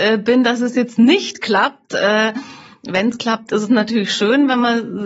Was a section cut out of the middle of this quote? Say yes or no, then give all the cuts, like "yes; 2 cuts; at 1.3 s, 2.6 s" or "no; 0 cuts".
no; 0 cuts